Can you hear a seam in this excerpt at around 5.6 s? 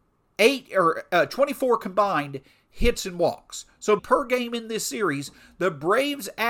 no; 1 cut; at 4.0 s

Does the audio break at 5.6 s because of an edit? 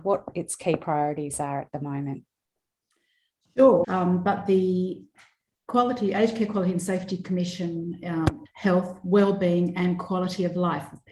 no; 2 cuts; at 3.8 s, 8.5 s

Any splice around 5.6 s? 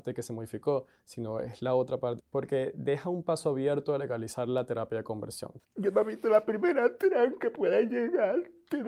yes; 2 cuts; at 2.2 s, 5.6 s

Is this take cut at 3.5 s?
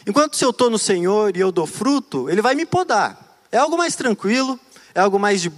no; 0 cuts

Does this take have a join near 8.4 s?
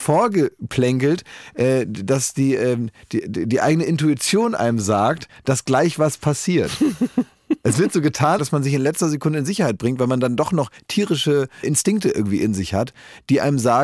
yes; 2 cuts; at 8.4 s, 11.6 s

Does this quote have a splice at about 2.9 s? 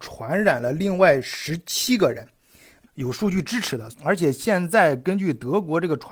yes; 2 cuts; at 2.9 s, 3.9 s

